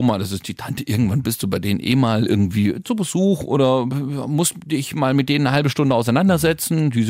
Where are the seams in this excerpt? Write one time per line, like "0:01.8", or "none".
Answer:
none